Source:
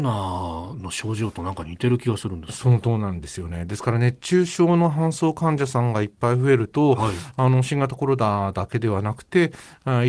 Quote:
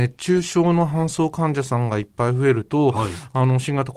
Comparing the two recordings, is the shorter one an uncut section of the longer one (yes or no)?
yes